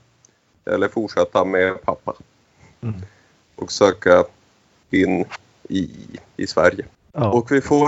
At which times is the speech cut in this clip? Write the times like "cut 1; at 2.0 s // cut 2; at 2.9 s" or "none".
cut 1; at 6.3 s